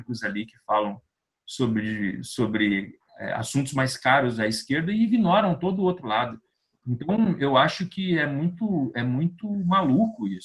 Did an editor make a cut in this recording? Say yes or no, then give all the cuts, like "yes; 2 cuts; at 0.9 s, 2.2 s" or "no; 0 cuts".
no; 0 cuts